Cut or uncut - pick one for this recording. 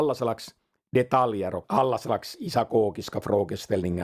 cut